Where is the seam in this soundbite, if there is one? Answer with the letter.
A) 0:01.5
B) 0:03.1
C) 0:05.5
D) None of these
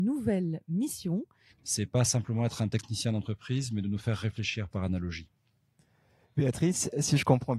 A